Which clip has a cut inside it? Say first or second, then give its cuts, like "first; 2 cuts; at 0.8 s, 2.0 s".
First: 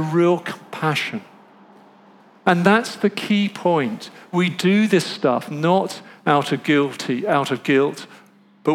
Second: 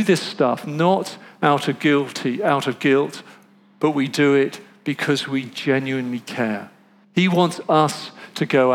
second; 1 cut; at 7.0 s